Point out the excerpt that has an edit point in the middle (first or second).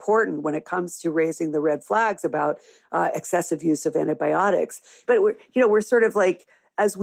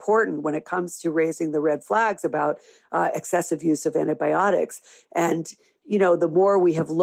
first